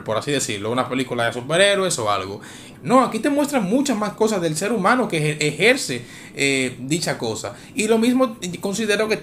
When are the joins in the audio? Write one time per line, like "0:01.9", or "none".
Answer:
0:02.7

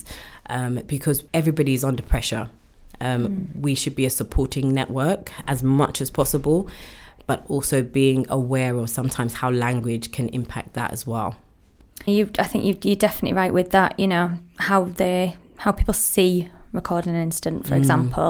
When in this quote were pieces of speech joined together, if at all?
0:01.3
0:12.1

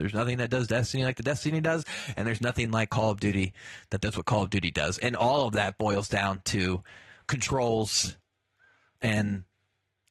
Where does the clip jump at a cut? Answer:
none

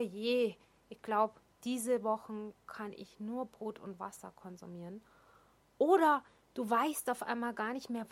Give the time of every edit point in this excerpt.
none

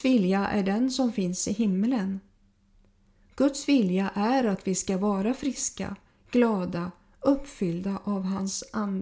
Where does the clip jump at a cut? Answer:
none

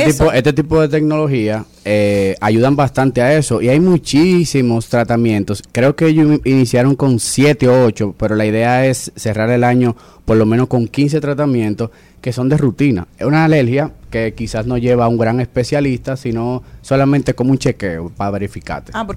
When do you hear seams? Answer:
0:13.1

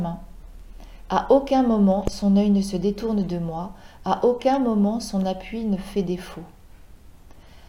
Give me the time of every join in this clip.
none

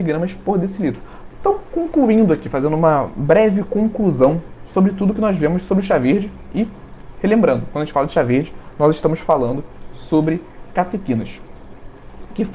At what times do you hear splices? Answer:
0:01.3

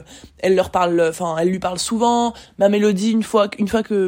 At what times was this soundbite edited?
0:02.5

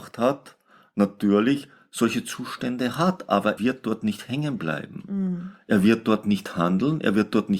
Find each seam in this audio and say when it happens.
0:03.6

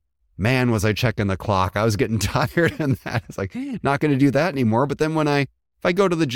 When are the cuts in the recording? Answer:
none

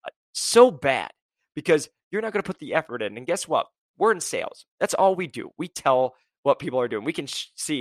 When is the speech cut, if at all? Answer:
none

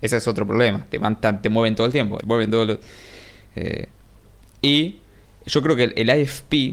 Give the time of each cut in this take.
0:02.2
0:03.5

